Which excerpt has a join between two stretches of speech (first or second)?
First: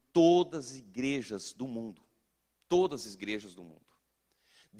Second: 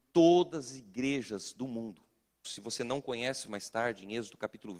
second